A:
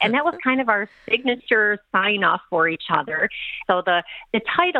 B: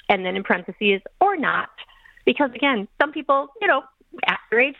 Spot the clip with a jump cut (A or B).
A